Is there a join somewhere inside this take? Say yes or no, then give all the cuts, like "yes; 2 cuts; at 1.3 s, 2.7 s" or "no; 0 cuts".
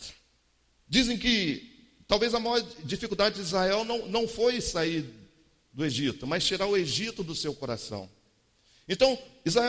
no; 0 cuts